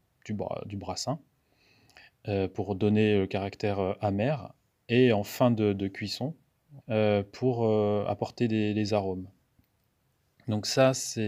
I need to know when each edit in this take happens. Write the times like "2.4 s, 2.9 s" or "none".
6.8 s